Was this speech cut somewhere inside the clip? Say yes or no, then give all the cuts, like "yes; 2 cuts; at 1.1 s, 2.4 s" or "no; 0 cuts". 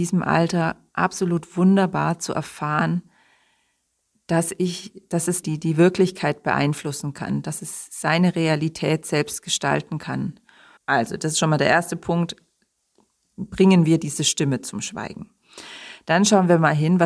yes; 2 cuts; at 5.4 s, 10.8 s